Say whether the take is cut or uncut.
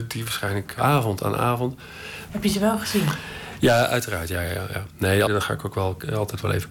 cut